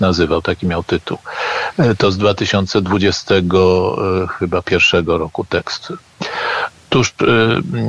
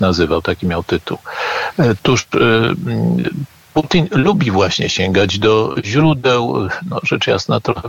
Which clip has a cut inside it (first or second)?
second